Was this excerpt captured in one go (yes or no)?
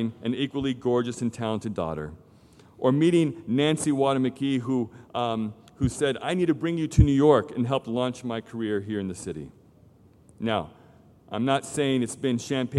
yes